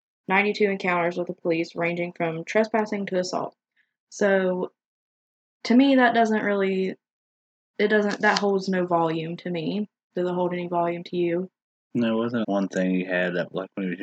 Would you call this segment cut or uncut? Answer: cut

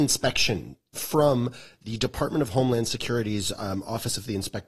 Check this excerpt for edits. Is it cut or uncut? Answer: cut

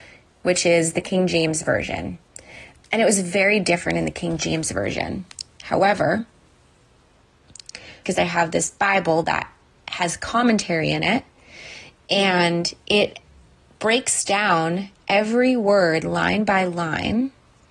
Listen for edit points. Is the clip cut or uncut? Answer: cut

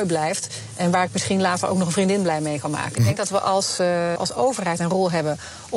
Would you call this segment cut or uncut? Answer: cut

